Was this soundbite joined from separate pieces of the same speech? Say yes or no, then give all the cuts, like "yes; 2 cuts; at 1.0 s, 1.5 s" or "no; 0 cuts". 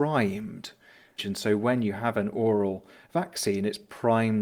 yes; 1 cut; at 1.2 s